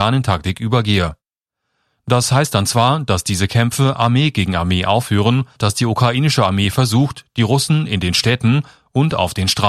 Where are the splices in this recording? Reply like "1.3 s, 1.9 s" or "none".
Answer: 5.6 s